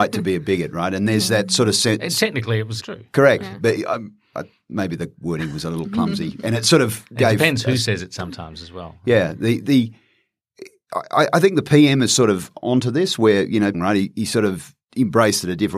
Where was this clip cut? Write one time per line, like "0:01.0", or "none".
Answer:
0:02.8
0:13.7